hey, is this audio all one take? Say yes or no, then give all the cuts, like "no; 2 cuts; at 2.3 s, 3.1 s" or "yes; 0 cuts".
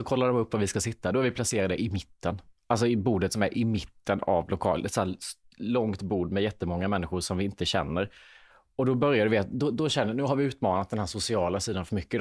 yes; 0 cuts